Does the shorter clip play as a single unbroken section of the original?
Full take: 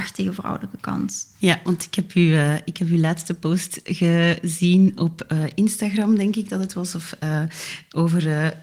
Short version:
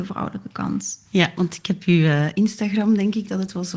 no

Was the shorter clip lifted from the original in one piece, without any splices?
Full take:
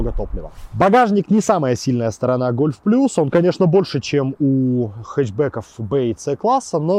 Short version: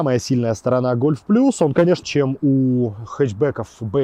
no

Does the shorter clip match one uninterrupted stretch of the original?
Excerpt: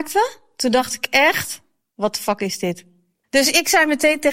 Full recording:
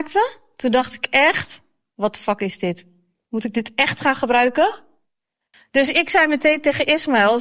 no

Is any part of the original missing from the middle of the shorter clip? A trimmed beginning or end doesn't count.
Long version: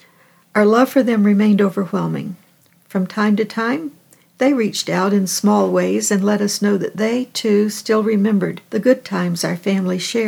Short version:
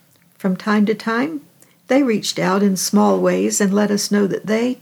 no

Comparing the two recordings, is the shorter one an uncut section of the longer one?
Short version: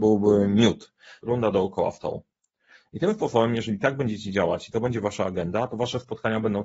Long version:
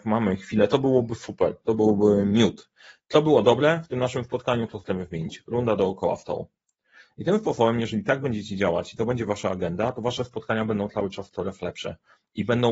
no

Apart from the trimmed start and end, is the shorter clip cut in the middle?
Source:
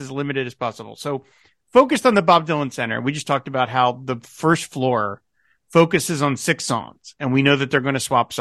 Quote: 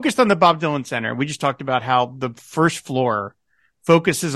no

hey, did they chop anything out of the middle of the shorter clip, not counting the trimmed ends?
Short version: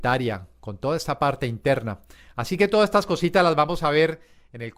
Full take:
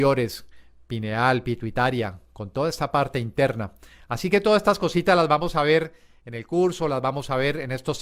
no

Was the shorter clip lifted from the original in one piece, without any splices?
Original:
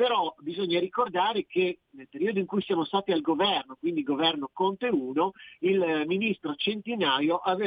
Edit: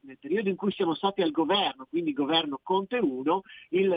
yes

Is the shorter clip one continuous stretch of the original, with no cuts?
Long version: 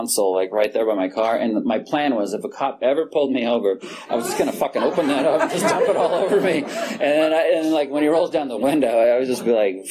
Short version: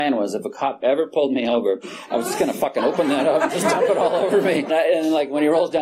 no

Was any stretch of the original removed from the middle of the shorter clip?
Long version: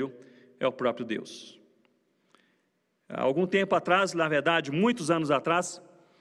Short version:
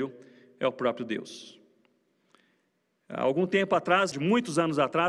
yes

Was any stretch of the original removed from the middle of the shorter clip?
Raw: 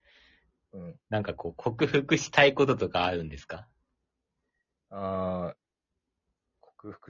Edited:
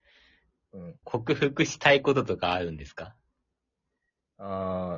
yes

